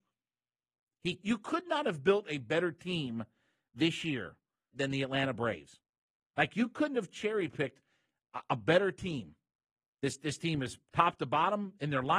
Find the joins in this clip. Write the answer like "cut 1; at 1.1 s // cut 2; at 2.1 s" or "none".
cut 1; at 1.2 s // cut 2; at 4.7 s